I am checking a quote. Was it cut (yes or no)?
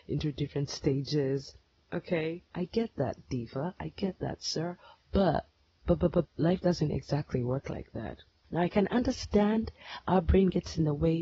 yes